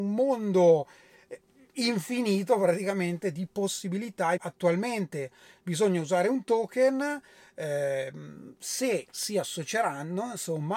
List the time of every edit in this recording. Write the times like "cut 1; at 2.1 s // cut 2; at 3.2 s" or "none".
cut 1; at 4.4 s